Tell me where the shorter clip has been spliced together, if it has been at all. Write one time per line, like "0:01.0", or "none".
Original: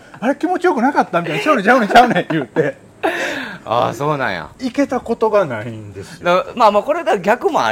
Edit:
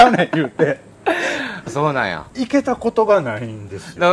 0:01.7